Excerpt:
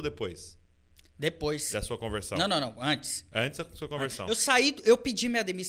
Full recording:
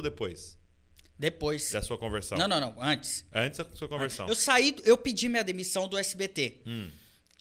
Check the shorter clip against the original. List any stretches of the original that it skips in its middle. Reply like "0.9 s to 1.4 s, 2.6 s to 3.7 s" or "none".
none